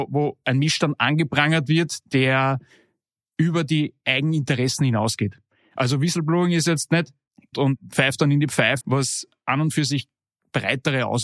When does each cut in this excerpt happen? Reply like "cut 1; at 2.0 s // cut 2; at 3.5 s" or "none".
cut 1; at 7.5 s // cut 2; at 8.8 s